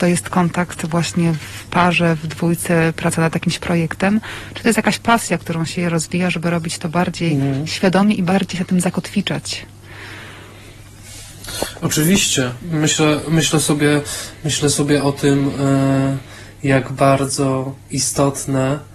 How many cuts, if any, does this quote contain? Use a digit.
0